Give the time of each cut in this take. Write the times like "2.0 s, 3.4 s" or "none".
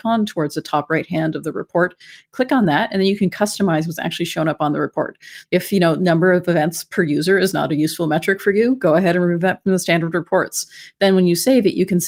5.5 s